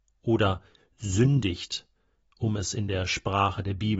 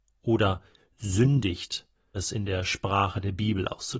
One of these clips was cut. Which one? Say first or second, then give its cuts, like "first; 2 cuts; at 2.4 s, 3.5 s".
second; 1 cut; at 2.1 s